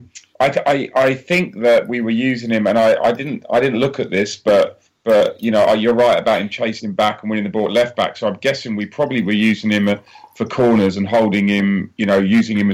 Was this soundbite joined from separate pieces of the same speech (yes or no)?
no